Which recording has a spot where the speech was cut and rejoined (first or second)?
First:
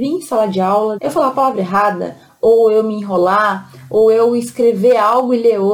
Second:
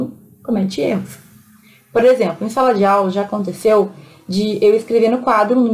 first